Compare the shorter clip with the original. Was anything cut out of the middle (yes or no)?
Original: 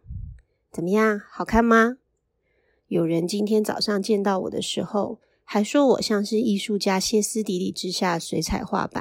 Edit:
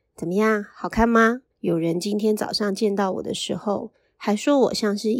yes